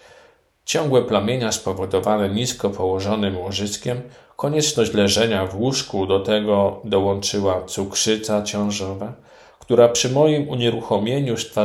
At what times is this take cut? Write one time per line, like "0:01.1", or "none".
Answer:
none